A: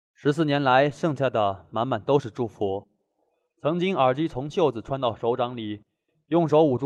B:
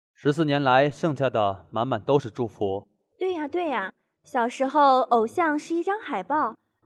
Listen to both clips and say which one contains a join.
B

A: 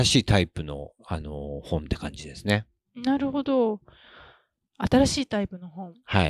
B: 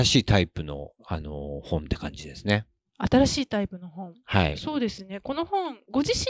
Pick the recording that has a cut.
B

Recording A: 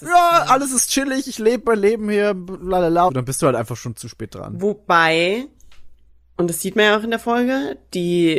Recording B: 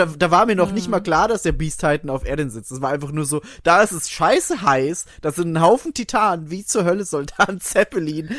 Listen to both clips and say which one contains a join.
A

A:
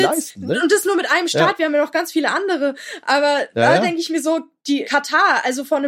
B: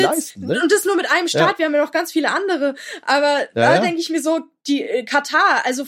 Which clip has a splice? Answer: A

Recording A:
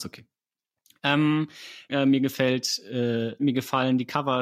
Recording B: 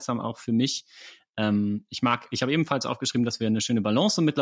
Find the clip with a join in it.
A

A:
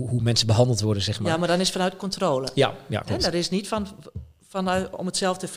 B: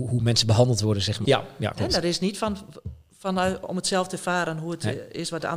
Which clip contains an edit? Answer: B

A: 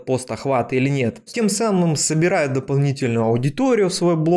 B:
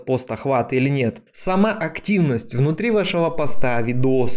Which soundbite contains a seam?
A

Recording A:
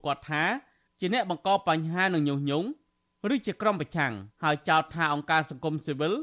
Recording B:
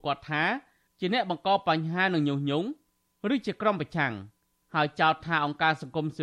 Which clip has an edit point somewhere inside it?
A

